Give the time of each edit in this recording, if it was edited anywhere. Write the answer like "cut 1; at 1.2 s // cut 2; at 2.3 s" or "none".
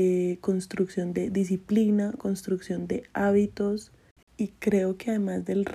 cut 1; at 4.2 s